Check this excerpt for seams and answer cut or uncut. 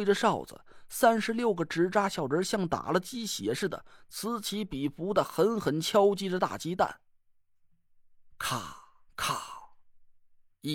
cut